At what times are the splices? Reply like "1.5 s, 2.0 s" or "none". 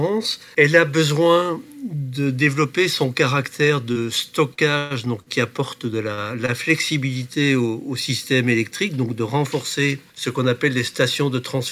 none